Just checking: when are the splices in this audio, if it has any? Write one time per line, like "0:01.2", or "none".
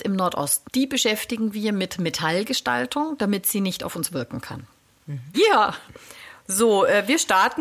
0:05.3